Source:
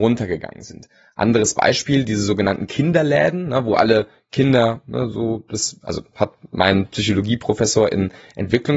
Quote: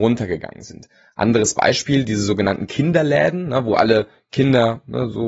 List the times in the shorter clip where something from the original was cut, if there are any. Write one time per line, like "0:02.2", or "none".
none